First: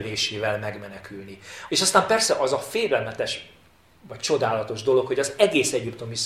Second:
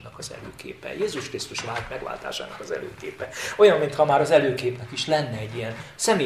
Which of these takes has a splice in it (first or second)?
first